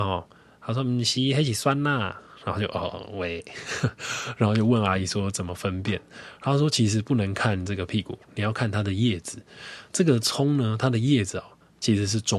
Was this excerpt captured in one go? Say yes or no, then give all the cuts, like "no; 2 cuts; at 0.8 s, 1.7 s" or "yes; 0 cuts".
yes; 0 cuts